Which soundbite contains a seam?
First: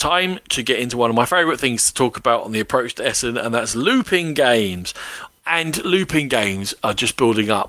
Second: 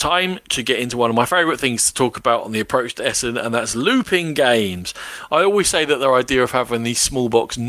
first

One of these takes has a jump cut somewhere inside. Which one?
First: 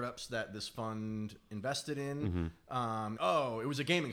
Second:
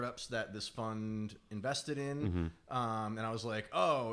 first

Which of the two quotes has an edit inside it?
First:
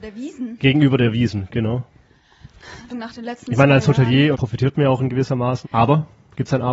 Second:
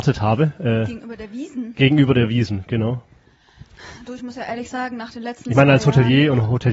first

